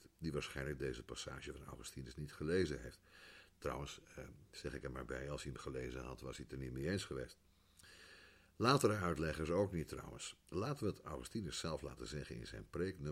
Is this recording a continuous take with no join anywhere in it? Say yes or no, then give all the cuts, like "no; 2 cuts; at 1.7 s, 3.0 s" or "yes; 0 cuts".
yes; 0 cuts